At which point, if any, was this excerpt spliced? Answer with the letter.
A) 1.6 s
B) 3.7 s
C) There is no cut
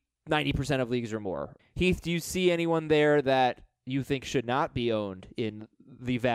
A